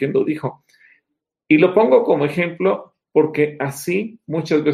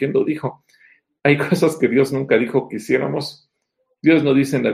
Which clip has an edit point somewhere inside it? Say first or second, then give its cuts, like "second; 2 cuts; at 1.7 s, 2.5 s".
second; 1 cut; at 1.2 s